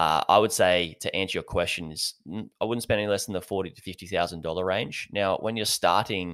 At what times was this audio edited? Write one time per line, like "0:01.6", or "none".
none